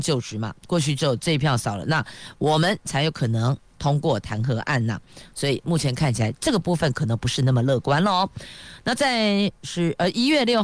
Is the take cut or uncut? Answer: uncut